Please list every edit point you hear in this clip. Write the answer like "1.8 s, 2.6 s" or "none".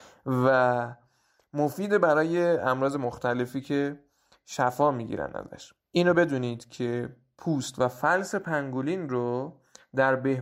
5.8 s